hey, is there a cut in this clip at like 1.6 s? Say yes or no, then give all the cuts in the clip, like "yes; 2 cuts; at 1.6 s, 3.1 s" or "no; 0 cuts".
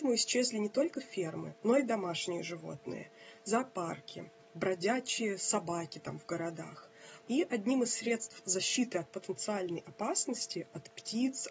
no; 1 cut; at 7.2 s